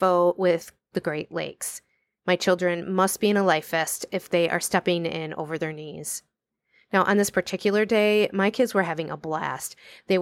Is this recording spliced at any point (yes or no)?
no